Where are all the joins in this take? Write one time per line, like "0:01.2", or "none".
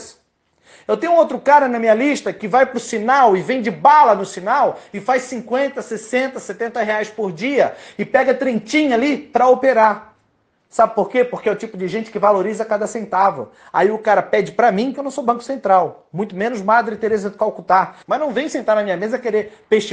0:14.9
0:18.0